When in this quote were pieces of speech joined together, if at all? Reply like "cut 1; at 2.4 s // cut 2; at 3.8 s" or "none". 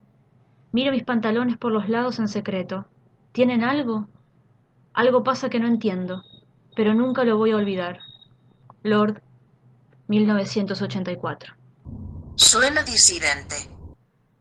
cut 1; at 8.6 s